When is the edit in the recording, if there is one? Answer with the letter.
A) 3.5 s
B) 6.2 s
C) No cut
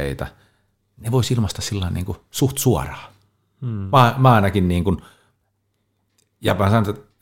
C